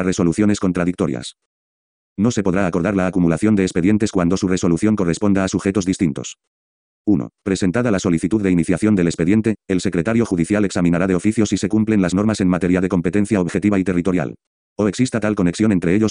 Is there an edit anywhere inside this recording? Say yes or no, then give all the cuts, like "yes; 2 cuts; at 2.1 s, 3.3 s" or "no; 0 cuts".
yes; 2 cuts; at 7.0 s, 14.6 s